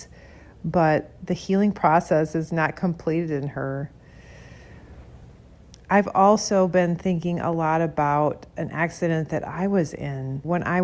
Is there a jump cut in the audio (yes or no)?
no